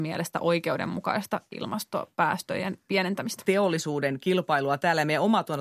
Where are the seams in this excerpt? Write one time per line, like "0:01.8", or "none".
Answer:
0:03.5

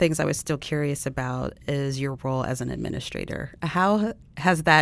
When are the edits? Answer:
none

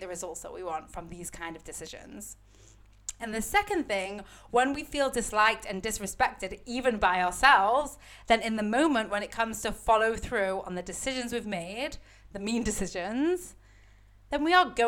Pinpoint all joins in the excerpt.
0:03.2

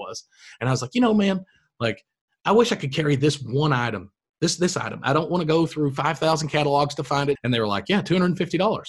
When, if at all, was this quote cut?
0:07.4

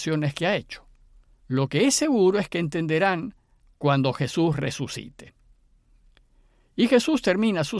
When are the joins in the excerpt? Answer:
0:01.4

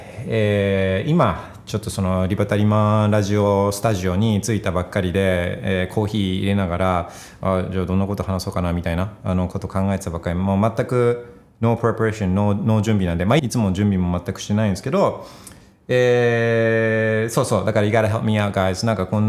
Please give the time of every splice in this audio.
0:13.4

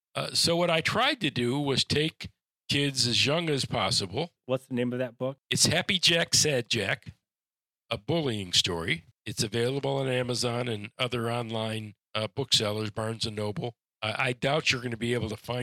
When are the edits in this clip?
none

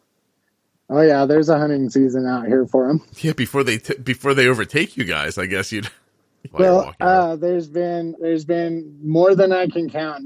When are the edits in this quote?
0:06.5
0:08.2

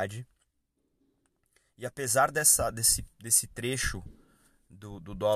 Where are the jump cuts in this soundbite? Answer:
none

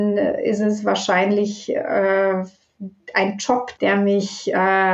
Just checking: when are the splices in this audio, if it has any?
0:03.8

